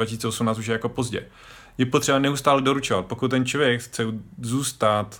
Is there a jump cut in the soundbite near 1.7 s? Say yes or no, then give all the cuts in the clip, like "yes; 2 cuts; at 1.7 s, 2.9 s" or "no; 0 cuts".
no; 0 cuts